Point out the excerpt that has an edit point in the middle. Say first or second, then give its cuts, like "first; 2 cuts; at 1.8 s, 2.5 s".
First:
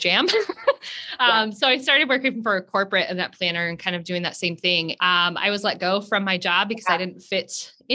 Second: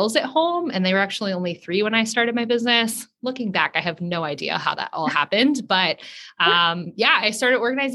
first; 1 cut; at 5.0 s